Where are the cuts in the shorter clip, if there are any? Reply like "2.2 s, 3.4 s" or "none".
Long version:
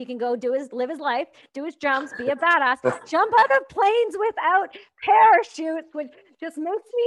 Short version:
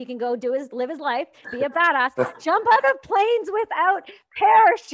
1.4 s